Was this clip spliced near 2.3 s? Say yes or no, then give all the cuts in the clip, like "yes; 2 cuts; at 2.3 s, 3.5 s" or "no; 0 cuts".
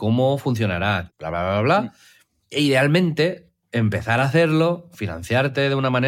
no; 1 cut; at 1.1 s